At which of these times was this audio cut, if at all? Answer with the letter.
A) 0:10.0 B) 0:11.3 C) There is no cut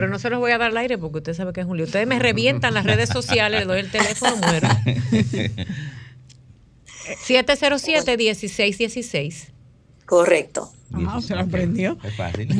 B